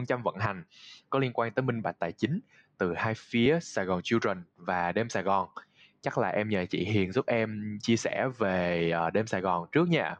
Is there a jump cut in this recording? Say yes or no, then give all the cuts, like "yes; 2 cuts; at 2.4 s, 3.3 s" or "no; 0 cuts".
no; 0 cuts